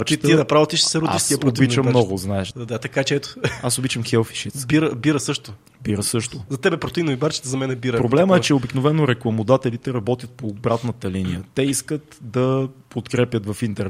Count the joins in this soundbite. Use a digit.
2